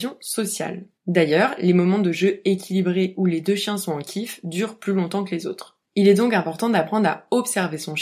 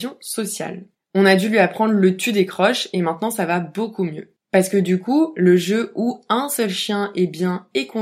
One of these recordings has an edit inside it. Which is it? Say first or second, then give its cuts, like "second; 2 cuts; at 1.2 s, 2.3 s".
second; 1 cut; at 0.9 s